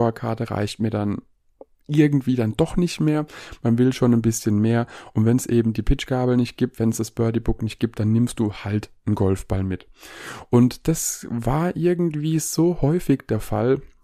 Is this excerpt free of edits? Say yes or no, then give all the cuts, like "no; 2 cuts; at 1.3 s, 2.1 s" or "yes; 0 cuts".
yes; 0 cuts